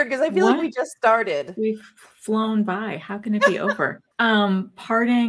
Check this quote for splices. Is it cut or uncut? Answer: cut